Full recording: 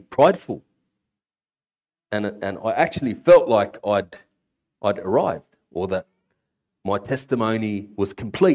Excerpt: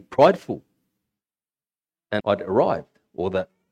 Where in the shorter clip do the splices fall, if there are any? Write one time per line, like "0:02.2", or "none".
0:02.2